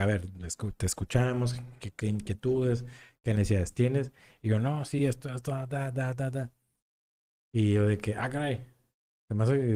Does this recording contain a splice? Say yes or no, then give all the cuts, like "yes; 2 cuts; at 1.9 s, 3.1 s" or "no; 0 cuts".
no; 0 cuts